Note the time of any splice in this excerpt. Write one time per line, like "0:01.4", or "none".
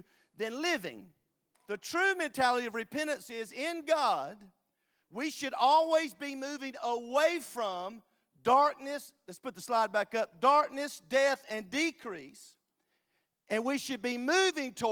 0:01.5